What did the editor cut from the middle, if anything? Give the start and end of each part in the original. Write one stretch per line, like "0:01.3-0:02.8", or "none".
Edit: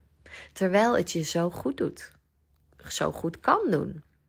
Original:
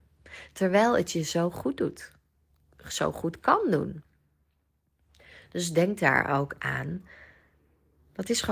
none